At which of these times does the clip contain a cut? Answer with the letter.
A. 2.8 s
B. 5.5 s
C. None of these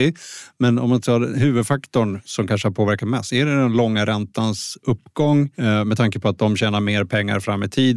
B